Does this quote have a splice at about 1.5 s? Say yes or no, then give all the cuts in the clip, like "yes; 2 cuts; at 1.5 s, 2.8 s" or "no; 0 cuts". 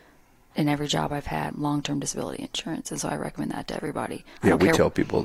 yes; 1 cut; at 1.5 s